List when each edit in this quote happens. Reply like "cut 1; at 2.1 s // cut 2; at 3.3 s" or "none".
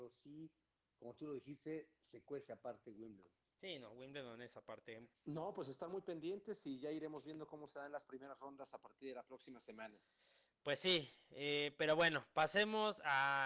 cut 1; at 5.1 s